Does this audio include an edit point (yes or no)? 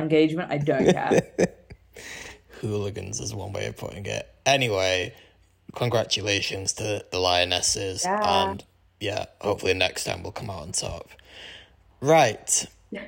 no